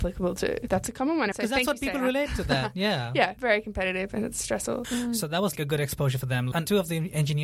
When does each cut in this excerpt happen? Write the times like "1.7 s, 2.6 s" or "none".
1.3 s, 4.8 s